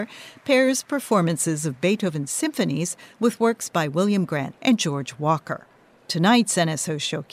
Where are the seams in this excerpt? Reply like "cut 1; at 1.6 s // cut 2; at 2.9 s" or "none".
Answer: cut 1; at 4.5 s